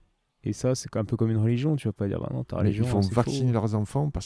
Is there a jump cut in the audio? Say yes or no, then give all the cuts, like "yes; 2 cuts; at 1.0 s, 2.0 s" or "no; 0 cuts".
no; 0 cuts